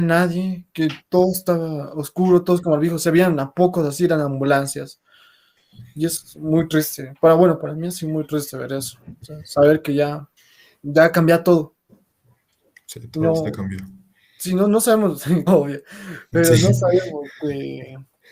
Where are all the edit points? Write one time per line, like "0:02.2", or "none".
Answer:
0:15.5